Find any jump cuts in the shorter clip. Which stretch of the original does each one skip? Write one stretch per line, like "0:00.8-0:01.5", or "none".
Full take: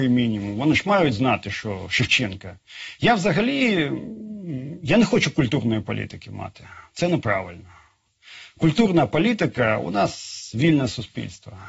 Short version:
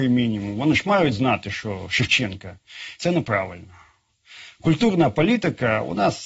0:03.0-0:06.9